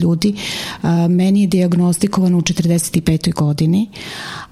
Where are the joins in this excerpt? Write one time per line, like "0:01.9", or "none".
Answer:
none

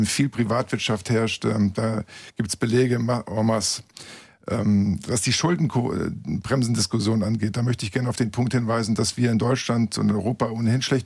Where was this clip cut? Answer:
none

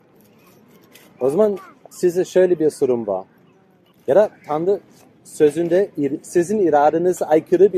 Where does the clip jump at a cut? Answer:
0:03.9

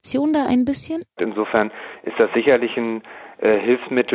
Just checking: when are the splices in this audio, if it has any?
0:01.2

